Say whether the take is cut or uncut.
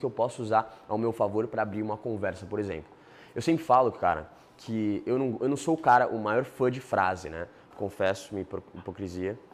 cut